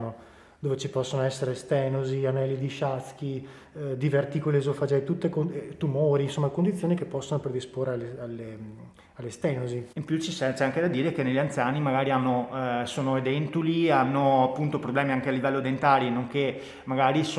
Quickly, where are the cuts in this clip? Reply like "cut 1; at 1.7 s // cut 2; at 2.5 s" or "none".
cut 1; at 9.9 s